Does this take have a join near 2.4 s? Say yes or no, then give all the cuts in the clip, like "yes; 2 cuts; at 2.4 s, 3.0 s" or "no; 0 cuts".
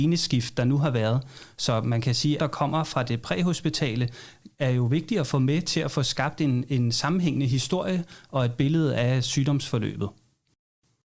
yes; 1 cut; at 2.4 s